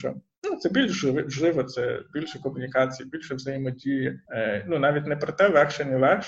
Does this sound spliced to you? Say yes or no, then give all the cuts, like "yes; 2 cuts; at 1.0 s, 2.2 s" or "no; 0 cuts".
yes; 1 cut; at 4.3 s